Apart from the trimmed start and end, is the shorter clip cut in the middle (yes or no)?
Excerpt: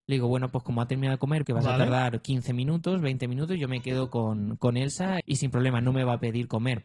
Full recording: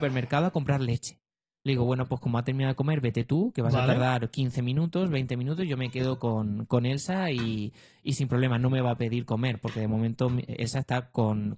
yes